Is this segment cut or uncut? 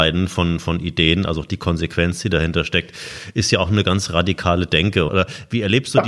cut